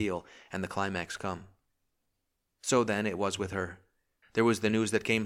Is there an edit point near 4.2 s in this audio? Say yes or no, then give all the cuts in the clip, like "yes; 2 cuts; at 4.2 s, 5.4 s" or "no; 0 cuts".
yes; 1 cut; at 4.2 s